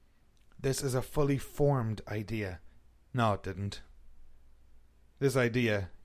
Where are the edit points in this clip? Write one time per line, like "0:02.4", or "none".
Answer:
0:03.0